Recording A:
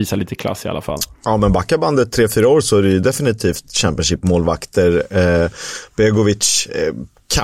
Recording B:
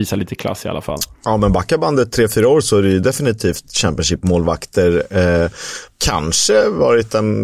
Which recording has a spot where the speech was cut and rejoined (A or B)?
B